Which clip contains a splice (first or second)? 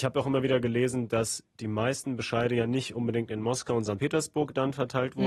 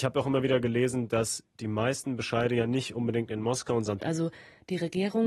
second